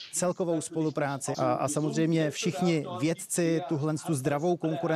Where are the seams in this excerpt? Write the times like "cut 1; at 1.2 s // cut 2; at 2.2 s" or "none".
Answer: cut 1; at 1.3 s